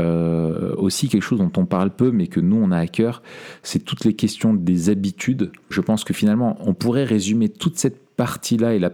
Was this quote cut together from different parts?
yes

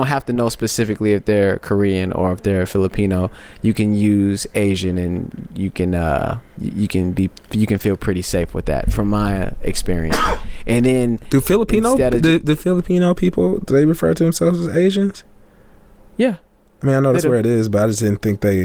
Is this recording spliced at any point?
no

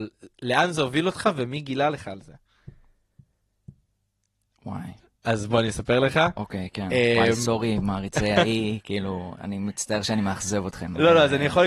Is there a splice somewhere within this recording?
no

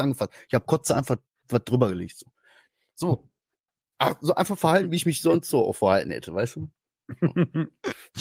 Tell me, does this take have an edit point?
no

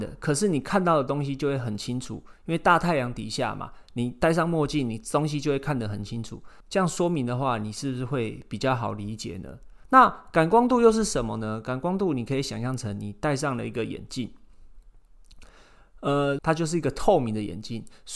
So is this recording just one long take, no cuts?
no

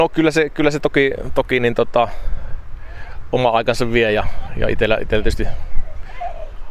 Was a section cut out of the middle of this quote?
no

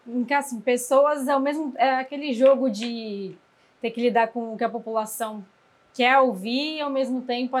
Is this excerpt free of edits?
yes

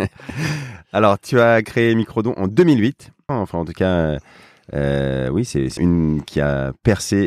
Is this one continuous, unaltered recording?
no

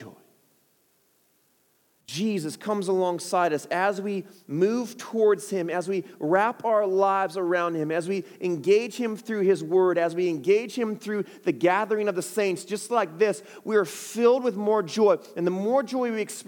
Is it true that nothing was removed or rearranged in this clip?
yes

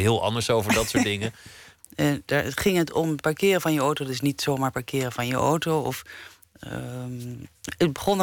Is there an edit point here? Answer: yes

